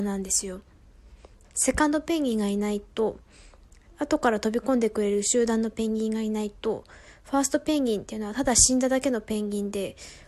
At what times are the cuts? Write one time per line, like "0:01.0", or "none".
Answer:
0:01.4